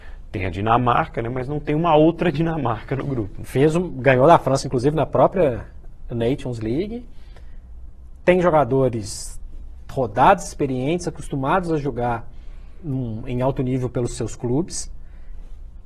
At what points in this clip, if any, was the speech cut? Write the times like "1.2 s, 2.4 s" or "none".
3.4 s